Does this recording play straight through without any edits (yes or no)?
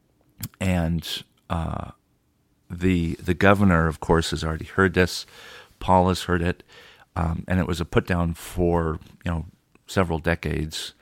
yes